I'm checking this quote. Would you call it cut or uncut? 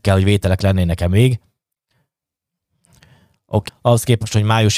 cut